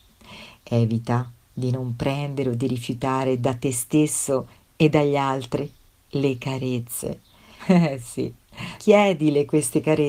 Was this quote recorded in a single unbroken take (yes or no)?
no